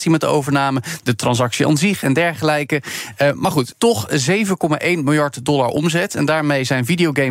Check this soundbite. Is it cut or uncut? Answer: cut